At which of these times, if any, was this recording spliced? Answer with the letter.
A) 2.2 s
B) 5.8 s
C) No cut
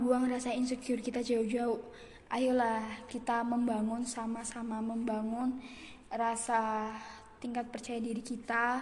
A